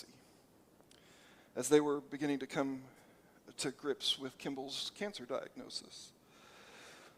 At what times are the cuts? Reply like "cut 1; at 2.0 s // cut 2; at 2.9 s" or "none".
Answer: none